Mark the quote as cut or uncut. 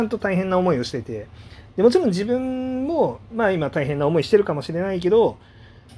uncut